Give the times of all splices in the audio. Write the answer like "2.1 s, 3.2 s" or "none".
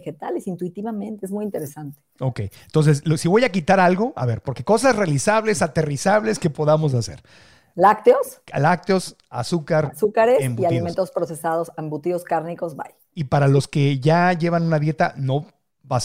none